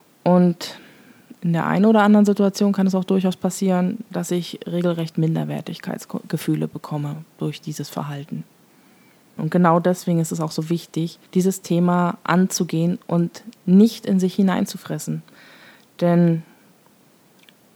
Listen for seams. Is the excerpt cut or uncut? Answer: cut